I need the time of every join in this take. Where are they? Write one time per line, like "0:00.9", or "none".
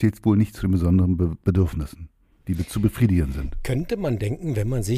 none

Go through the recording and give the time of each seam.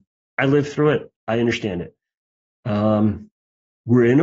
none

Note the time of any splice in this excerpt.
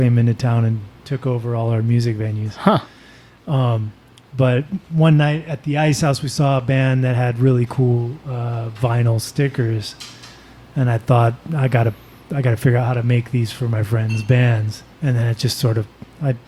0:14.9

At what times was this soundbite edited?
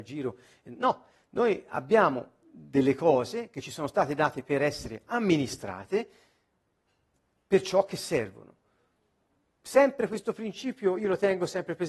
0:09.5

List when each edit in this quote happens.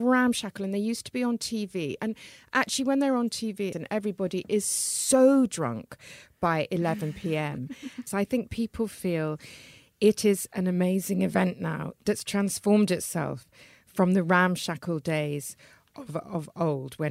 0:03.7
0:08.1

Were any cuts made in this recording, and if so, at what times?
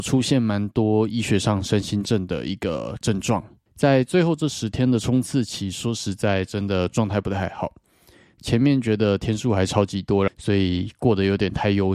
0:03.7
0:08.3
0:10.3

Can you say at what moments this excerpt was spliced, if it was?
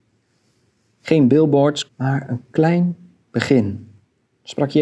0:01.9

